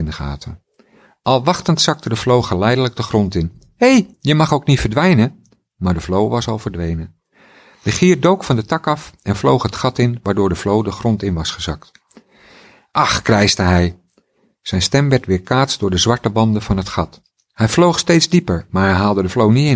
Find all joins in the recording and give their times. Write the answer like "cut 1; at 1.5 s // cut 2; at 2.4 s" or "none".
cut 1; at 4.1 s